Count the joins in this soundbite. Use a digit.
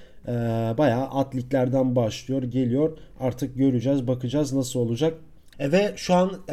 1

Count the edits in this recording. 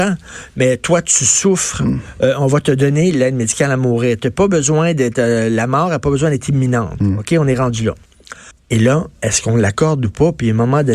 1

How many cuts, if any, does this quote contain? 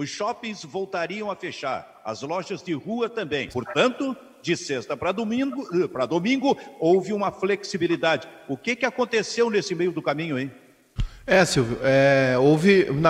1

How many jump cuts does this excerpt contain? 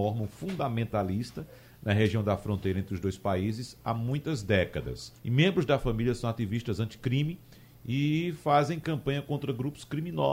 1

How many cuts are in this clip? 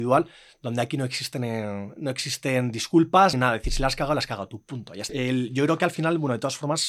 2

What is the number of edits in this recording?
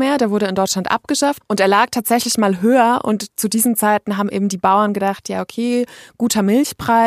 1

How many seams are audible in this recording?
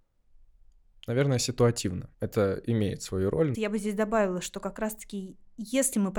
2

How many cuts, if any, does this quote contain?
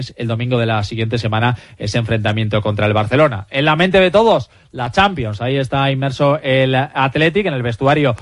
0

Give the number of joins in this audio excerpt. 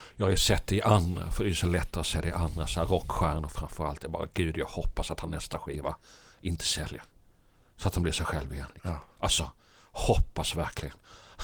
0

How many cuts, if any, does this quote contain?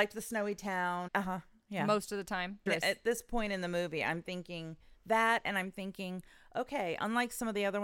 2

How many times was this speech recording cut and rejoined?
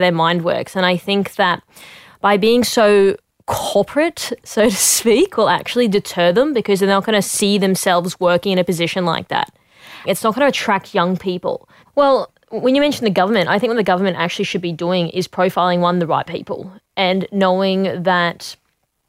2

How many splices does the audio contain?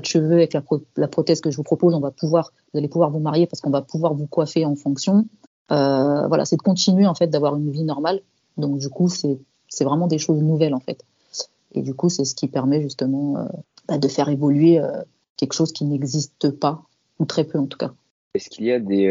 0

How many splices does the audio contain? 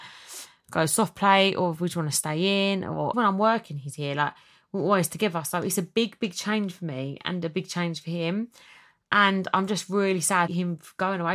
1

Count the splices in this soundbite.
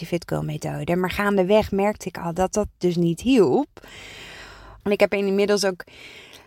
1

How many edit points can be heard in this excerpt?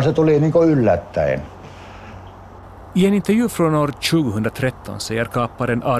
0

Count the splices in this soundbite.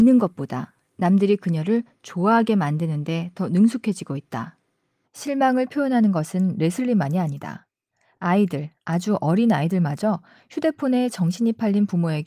1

